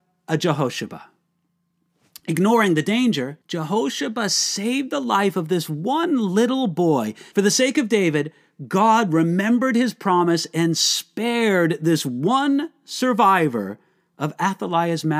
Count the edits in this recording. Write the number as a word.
two